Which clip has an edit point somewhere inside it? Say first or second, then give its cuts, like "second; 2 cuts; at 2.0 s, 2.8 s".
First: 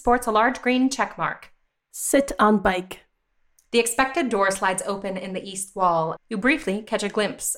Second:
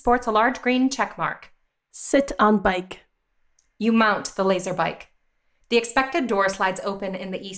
first; 2 cuts; at 3.7 s, 6.2 s